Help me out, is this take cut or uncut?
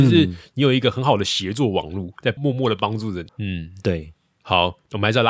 cut